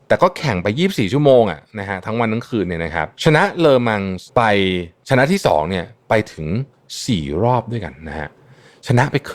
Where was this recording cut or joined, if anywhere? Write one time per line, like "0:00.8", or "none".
0:03.1
0:04.3